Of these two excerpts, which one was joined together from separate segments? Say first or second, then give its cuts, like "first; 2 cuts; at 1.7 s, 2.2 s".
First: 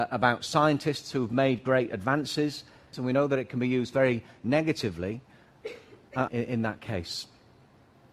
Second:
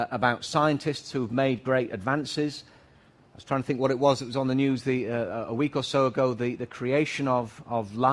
first; 2 cuts; at 2.9 s, 6.3 s